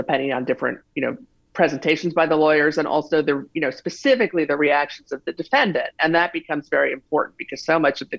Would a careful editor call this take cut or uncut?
uncut